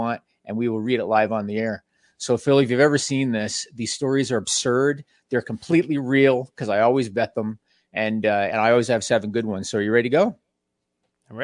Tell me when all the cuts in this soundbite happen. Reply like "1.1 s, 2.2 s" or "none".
none